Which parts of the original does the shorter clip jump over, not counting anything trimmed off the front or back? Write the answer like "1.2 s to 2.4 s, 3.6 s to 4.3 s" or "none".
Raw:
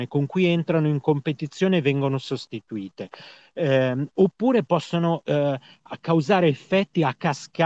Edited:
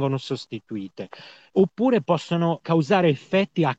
3.5 s to 4.1 s, 5.2 s to 6.0 s